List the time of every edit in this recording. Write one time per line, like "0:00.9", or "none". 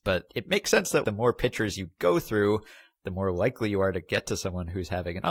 0:01.0